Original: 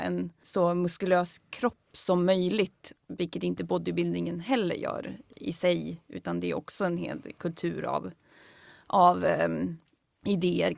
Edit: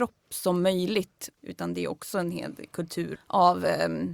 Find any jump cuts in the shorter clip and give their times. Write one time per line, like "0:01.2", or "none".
0:01.4
0:03.2